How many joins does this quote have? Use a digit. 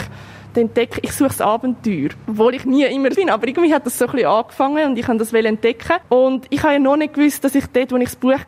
1